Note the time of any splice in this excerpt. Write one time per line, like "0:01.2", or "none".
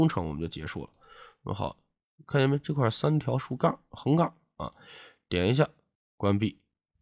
0:05.9